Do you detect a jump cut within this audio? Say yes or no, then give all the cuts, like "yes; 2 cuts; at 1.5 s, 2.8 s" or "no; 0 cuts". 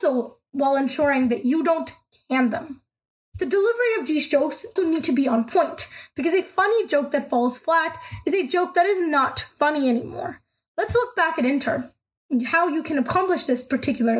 yes; 1 cut; at 4.8 s